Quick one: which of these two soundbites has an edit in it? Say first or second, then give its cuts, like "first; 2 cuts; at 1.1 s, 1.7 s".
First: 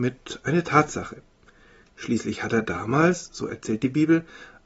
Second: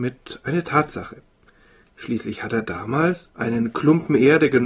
second; 1 cut; at 3.3 s